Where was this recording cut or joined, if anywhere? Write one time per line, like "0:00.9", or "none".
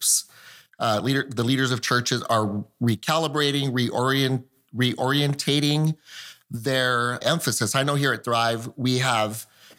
0:07.2